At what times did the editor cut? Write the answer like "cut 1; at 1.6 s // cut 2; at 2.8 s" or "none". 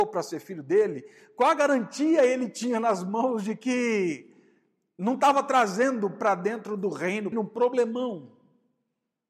cut 1; at 7.3 s